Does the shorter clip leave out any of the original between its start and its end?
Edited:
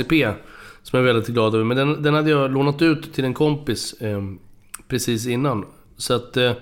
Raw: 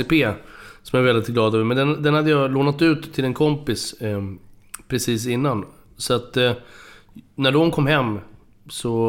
no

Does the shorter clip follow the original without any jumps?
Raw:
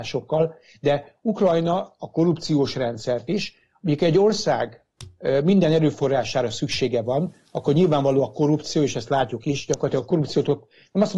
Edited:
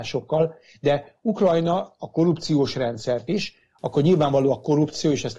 no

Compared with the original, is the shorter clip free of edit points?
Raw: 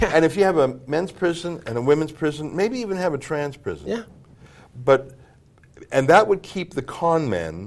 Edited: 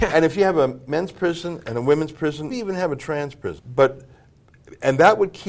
no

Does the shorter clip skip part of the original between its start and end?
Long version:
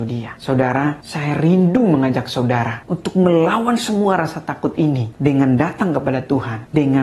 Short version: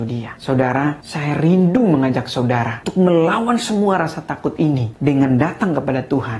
yes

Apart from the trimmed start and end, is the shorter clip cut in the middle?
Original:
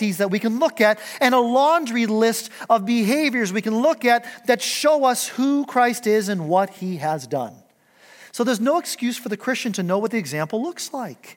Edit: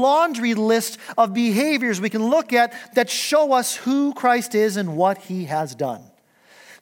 no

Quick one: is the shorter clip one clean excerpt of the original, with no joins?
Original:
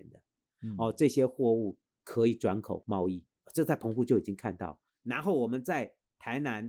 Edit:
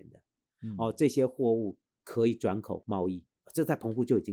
yes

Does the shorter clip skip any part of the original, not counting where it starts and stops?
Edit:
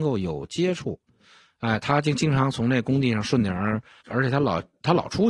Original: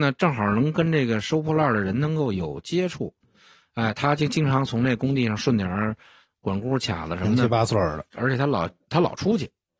yes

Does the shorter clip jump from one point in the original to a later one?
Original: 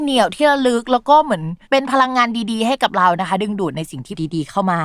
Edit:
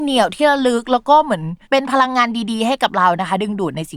no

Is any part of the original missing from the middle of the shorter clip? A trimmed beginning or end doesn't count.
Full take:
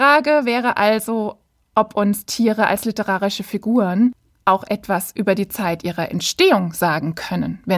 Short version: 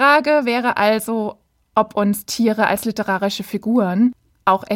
no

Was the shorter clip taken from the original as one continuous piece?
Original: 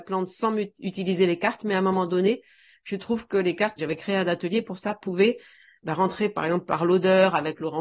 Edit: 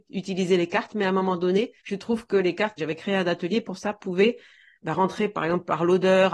no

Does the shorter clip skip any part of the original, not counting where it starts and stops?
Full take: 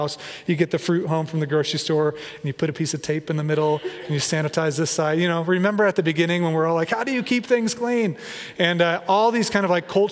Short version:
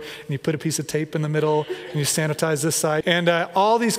yes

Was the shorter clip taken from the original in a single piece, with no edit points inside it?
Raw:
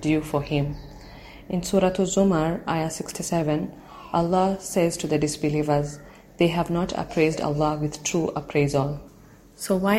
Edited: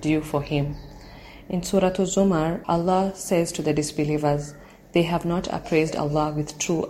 no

